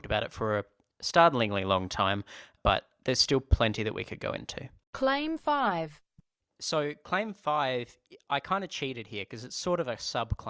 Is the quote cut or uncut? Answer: uncut